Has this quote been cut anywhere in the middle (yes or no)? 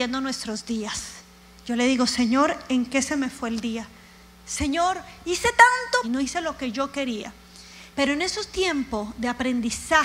yes